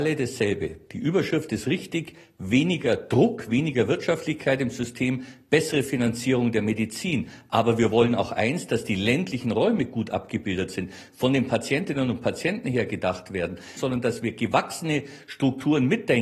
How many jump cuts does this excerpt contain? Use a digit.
1